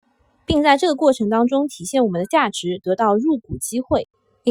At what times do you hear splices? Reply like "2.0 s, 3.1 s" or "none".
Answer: none